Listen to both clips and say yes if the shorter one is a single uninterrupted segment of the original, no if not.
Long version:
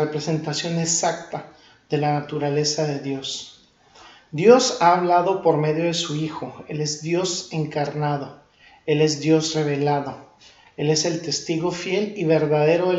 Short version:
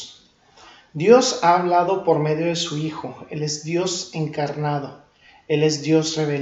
yes